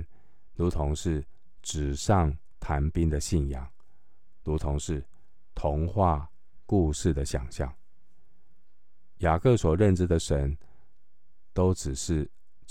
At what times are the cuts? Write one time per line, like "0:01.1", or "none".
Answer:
0:09.2